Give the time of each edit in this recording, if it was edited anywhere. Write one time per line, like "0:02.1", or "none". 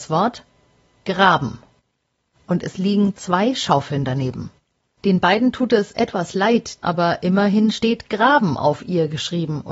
0:05.0
0:06.8